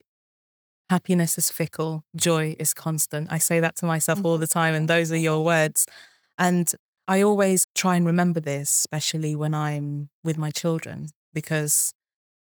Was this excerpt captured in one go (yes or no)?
no